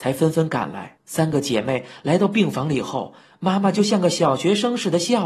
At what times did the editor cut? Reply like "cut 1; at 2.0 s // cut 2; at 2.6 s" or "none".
cut 1; at 1.0 s